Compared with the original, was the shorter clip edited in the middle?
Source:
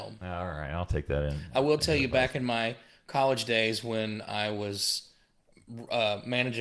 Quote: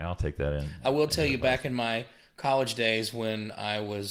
no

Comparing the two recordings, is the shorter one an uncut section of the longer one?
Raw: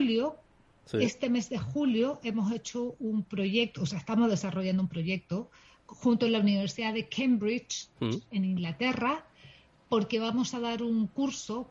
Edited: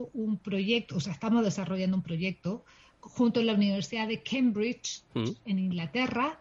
yes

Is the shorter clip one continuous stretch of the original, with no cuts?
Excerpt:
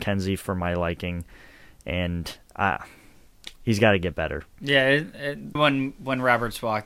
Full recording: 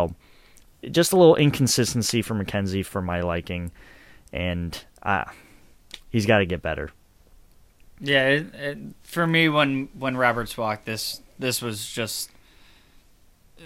no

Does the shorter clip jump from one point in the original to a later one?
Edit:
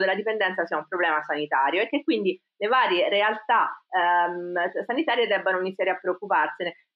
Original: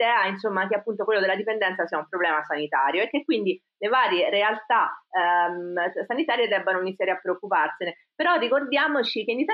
no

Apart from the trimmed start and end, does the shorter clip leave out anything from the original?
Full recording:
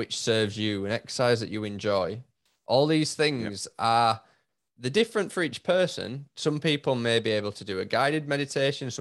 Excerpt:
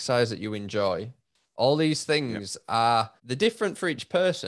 yes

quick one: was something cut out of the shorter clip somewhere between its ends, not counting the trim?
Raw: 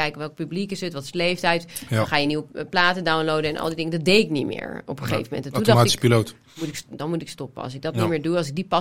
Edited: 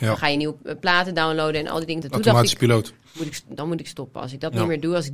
yes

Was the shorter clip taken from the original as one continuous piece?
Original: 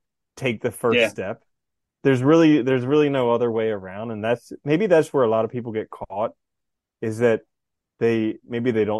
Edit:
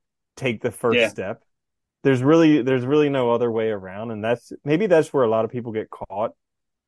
yes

